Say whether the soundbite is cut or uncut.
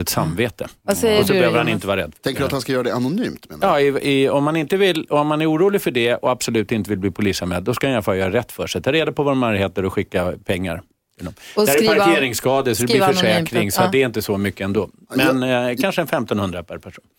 uncut